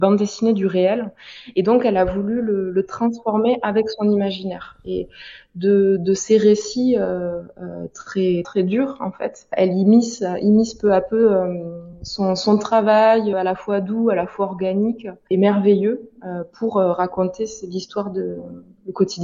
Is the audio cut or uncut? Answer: cut